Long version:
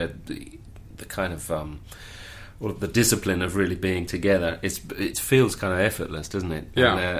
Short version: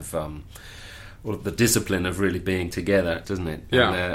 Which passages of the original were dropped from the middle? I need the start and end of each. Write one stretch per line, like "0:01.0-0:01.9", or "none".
0:04.6-0:06.3